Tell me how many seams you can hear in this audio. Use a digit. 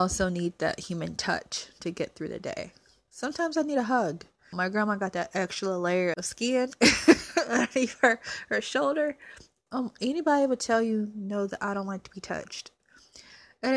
3